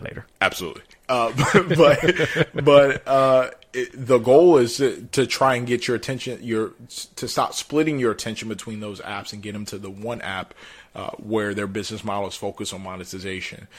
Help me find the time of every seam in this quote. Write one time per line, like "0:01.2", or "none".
none